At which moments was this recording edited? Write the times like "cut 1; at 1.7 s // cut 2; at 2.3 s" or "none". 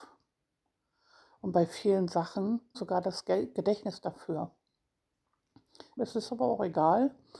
cut 1; at 2.7 s // cut 2; at 6.0 s